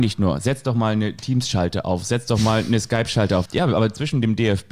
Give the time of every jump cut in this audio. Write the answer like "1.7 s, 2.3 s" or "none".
3.5 s